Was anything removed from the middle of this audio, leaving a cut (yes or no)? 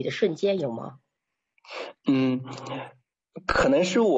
no